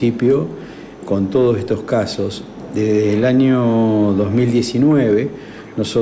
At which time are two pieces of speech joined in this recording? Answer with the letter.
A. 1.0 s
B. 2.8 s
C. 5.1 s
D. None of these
A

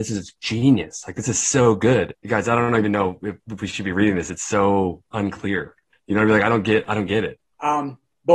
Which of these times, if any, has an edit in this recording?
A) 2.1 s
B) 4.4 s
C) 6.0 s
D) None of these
A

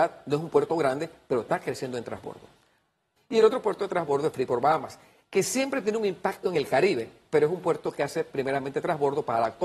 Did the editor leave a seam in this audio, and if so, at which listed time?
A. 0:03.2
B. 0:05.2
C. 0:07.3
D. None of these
A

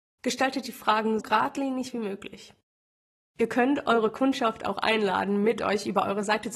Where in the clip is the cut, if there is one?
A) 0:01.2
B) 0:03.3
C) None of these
A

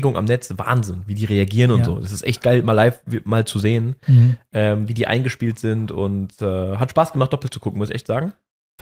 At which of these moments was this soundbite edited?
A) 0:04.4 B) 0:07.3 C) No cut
C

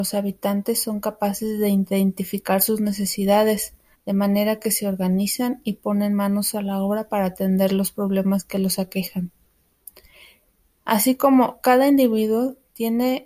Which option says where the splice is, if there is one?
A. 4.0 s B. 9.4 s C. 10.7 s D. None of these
A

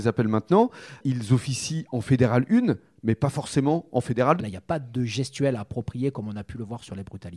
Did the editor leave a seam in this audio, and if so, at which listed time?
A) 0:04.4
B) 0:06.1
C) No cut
A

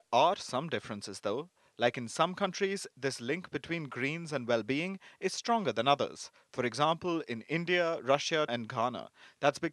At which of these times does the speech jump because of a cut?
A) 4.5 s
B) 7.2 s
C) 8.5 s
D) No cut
C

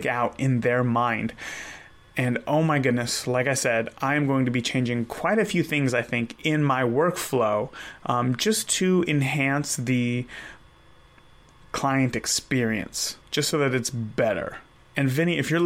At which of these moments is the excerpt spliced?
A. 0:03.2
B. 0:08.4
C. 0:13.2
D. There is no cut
C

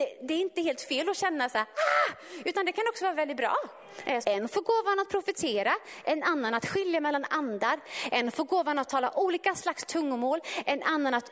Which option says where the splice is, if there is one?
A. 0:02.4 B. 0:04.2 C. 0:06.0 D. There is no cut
B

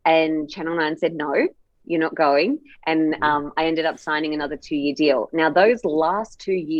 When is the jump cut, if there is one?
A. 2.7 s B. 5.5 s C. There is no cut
C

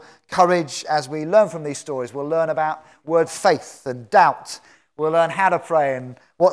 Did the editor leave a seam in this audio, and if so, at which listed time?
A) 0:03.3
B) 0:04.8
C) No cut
A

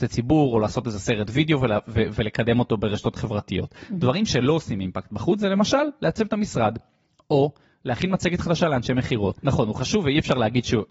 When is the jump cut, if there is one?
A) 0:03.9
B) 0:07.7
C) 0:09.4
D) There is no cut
C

